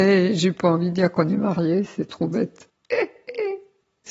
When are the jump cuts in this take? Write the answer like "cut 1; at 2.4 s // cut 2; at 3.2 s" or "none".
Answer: none

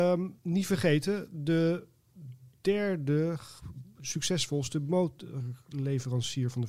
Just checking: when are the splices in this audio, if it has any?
none

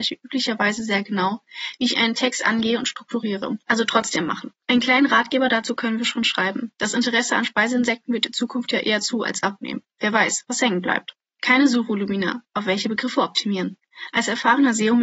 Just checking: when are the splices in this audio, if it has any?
cut 1; at 3.6 s

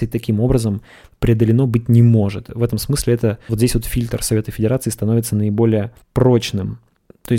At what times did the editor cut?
cut 1; at 3.5 s // cut 2; at 6.0 s

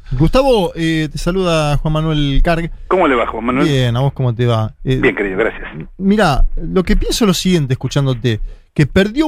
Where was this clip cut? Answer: none

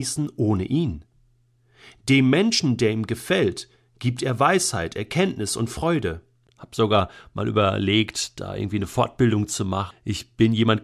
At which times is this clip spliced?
cut 1; at 6.5 s // cut 2; at 9.9 s

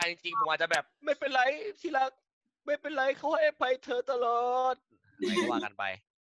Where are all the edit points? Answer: cut 1; at 0.9 s

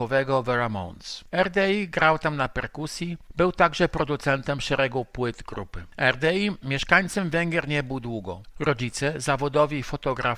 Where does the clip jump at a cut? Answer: cut 1; at 8.5 s

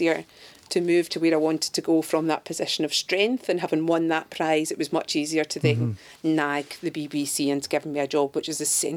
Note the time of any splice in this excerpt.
none

